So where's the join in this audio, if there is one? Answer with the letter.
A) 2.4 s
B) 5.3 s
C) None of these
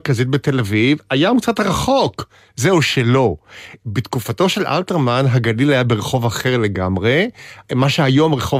C